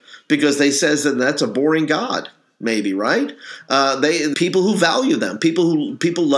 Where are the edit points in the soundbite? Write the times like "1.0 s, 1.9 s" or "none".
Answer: 4.3 s